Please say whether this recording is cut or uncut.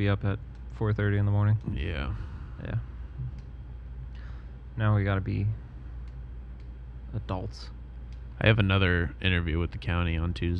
uncut